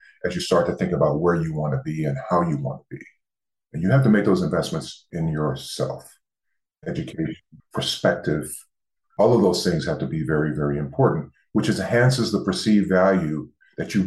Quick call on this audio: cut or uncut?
cut